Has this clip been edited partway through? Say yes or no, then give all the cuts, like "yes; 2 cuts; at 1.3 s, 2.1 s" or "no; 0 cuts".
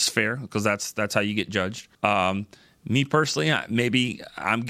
yes; 1 cut; at 1.9 s